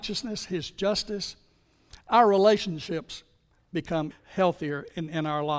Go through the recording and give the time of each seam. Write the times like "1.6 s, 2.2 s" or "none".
4.1 s